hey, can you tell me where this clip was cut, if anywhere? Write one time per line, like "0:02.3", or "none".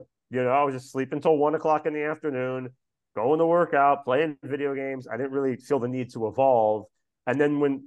none